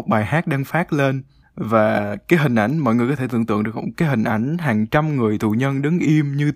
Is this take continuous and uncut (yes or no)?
yes